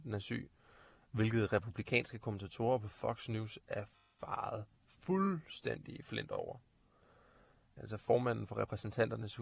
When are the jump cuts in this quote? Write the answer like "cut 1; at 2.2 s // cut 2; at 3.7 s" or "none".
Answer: cut 1; at 7.8 s